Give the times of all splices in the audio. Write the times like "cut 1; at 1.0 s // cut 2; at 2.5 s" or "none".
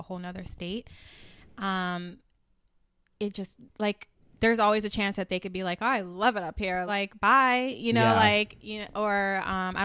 cut 1; at 6.9 s